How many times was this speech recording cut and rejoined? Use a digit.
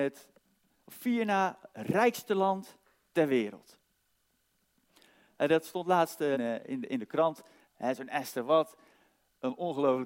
2